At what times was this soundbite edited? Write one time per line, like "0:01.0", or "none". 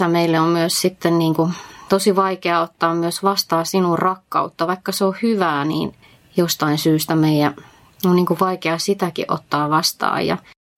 none